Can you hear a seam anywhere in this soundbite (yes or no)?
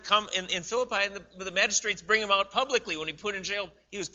no